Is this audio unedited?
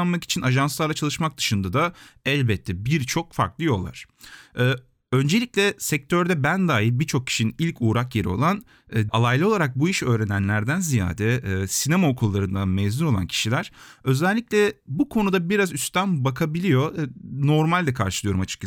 no; 1 cut; at 9.1 s

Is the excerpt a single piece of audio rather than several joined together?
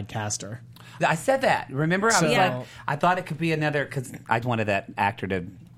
no; 2 cuts; at 1.0 s, 4.4 s

